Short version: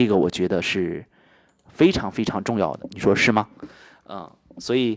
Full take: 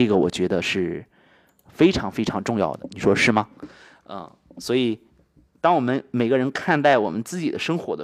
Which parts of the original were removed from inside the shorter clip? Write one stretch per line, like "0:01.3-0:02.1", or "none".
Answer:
none